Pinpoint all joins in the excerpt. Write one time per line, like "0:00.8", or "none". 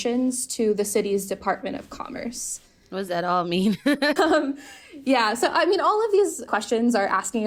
0:04.2
0:06.5